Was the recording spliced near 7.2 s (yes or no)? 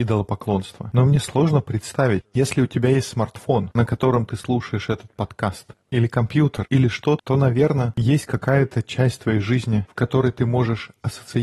yes